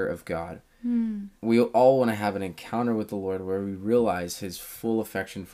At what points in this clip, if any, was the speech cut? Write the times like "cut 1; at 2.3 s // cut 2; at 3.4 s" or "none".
cut 1; at 1.4 s